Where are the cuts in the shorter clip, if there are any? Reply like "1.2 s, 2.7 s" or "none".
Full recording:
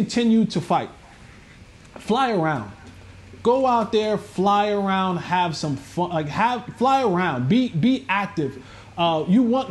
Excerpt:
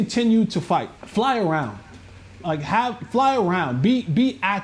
1.0 s, 2.4 s